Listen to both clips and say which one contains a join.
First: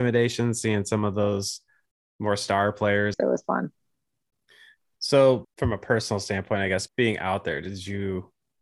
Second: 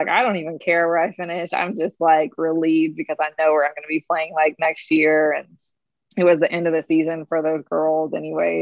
first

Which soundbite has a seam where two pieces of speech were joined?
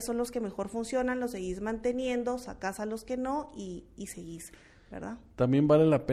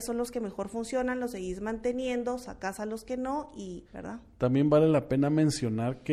second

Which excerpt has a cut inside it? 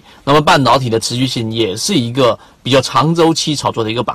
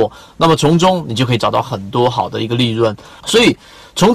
second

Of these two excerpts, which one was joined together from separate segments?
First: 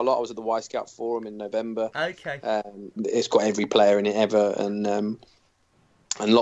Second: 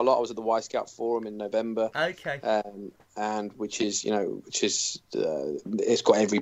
first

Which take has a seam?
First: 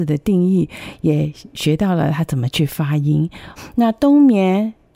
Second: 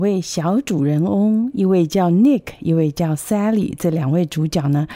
first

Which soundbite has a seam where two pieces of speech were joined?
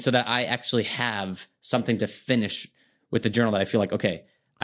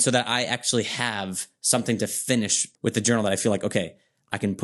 second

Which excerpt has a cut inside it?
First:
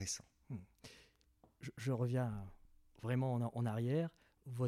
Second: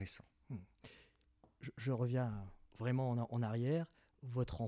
second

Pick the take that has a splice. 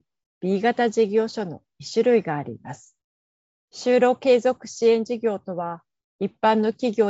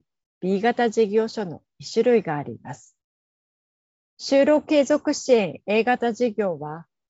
first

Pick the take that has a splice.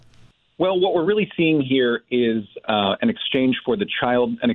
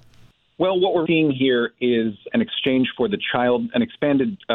second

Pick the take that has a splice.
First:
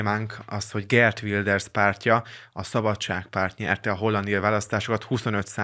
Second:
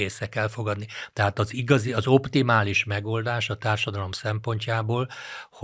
second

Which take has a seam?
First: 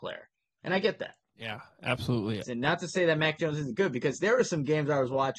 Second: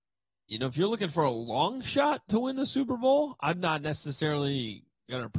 first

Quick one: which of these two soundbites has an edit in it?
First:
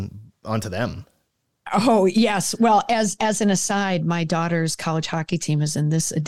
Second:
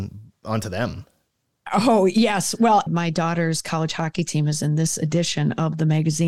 second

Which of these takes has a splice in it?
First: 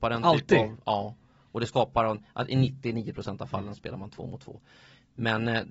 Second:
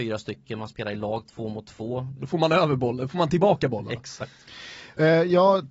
second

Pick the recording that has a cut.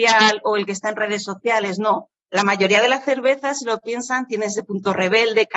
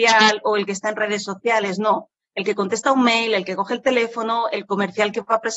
first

